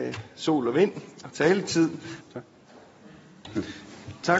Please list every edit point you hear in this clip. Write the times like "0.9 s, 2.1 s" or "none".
2.2 s